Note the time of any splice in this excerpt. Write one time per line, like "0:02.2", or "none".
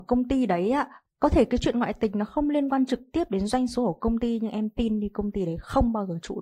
0:01.0